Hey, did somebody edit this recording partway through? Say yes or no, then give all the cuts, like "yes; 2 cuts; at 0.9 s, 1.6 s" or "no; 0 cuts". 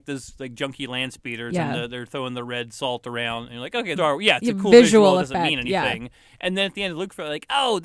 yes; 1 cut; at 4.0 s